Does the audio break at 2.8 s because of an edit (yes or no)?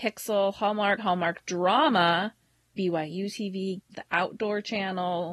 yes